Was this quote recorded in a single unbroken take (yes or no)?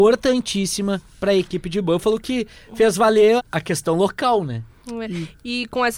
no